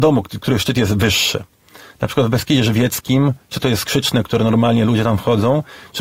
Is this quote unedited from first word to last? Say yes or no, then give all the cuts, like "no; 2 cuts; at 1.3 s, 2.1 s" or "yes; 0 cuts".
yes; 0 cuts